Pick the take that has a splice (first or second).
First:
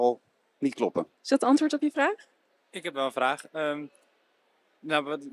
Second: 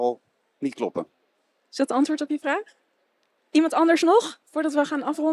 first